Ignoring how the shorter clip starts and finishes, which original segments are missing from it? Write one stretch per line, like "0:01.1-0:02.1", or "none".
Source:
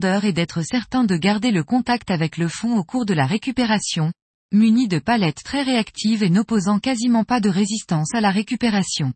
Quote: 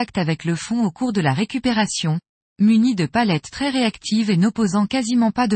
none